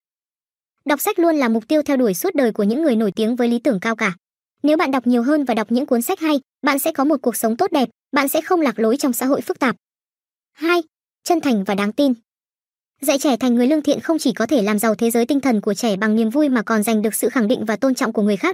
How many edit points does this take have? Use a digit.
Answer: 0